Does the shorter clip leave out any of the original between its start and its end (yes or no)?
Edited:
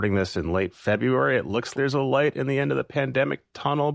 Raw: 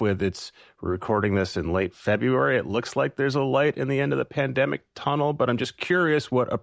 yes